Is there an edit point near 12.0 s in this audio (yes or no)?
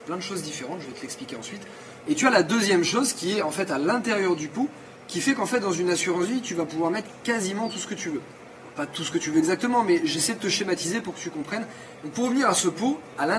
yes